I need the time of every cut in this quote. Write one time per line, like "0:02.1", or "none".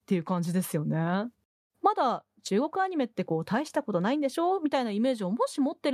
0:01.7

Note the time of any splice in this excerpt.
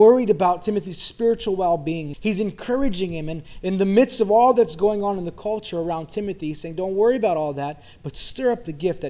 0:02.1

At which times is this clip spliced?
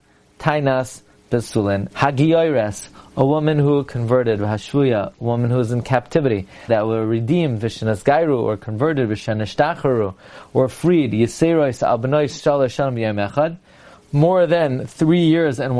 0:01.9
0:06.7

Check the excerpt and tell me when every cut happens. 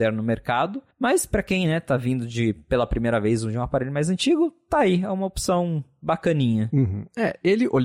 0:00.9

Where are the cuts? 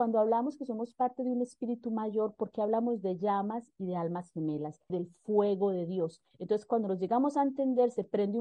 0:04.9
0:06.3

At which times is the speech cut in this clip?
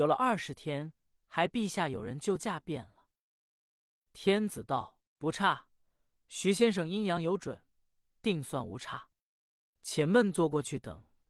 0:03.5

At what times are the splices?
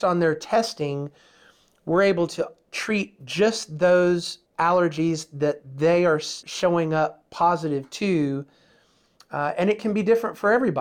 0:04.5
0:06.4

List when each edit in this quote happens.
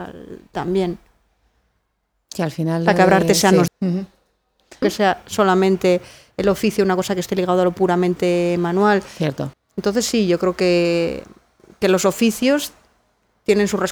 0:03.7
0:04.8
0:09.5

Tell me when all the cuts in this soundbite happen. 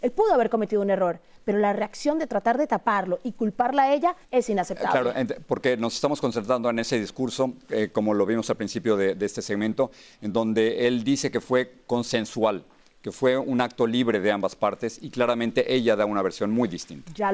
0:04.2

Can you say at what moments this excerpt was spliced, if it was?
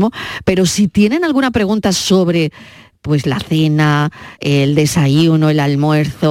none

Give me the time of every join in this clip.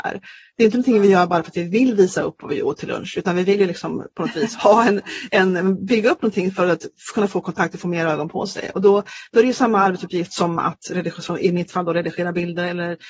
0:04.5

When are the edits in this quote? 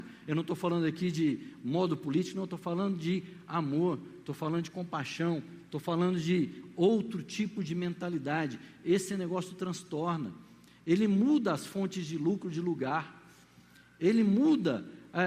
none

